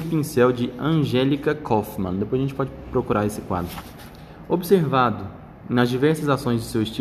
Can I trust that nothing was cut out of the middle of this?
yes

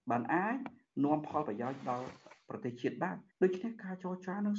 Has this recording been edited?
yes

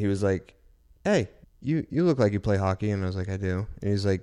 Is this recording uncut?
no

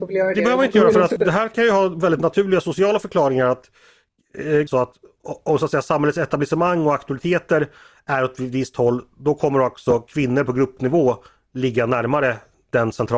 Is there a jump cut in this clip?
yes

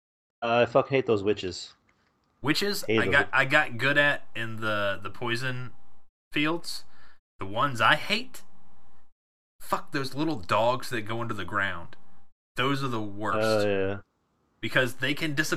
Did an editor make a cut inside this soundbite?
no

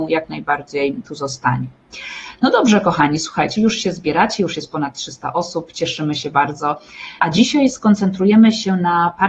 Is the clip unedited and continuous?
no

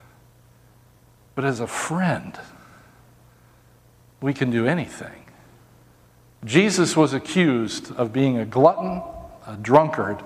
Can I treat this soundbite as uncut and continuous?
yes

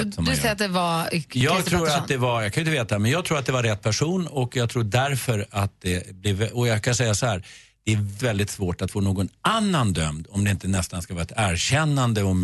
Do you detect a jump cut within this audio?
yes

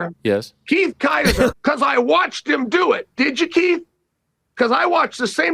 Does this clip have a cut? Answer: yes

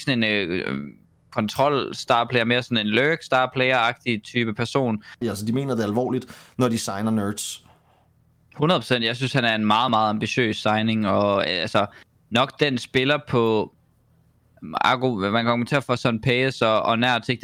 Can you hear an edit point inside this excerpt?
yes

